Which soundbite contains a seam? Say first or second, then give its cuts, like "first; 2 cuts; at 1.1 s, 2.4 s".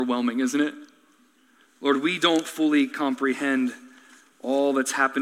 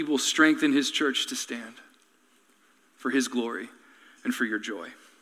first; 1 cut; at 1.7 s